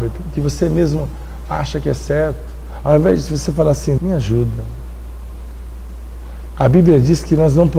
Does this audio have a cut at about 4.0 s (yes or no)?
yes